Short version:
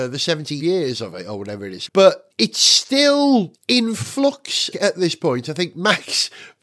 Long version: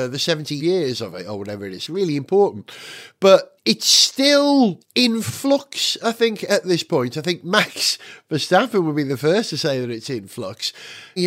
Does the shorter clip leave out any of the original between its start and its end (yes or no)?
yes